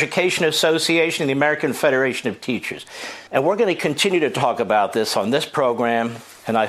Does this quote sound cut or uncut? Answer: cut